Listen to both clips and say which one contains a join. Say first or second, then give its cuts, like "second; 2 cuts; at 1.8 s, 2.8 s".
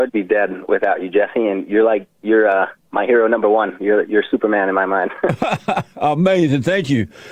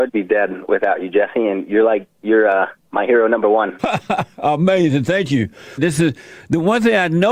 second; 2 cuts; at 3.8 s, 5.8 s